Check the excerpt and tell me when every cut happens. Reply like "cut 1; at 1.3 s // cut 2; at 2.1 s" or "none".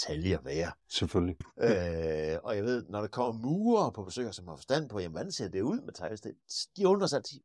cut 1; at 1.4 s